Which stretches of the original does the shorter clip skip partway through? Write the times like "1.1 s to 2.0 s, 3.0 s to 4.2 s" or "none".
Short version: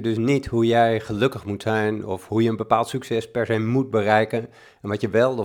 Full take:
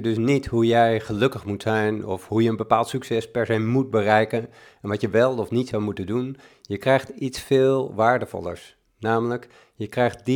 none